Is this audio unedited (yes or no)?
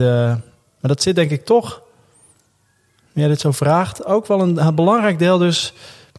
yes